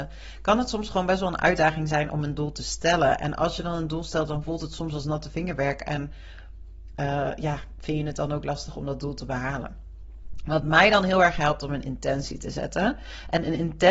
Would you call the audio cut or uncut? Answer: uncut